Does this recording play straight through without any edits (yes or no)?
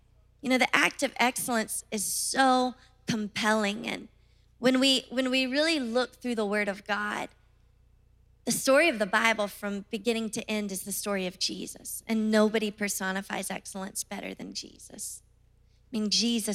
yes